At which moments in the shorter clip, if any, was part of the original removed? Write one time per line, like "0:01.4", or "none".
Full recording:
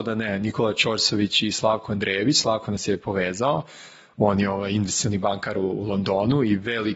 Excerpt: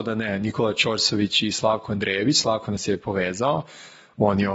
none